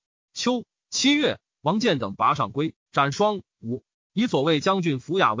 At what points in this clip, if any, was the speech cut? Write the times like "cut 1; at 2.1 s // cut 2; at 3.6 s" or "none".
cut 1; at 3.9 s